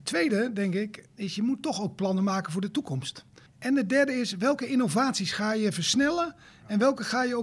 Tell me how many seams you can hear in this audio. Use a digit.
1